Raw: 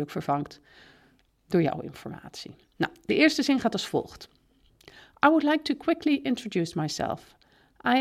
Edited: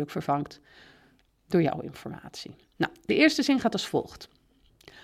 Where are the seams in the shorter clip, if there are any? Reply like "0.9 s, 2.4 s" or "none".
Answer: none